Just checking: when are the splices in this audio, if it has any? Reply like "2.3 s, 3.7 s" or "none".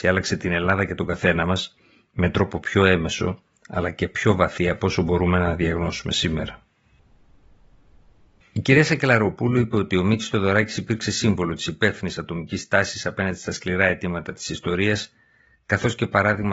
none